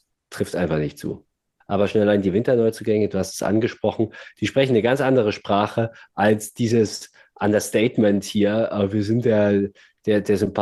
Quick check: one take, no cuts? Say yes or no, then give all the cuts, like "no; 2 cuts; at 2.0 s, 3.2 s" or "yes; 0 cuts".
no; 1 cut; at 1.6 s